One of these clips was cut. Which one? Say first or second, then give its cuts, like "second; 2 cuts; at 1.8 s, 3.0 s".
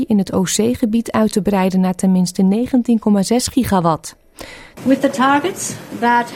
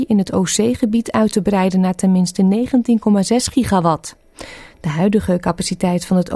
first; 1 cut; at 4.8 s